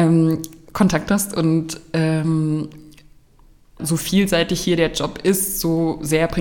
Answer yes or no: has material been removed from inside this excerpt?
yes